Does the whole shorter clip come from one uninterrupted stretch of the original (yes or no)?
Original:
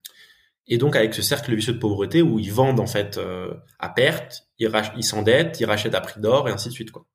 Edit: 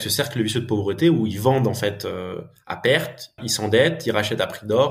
no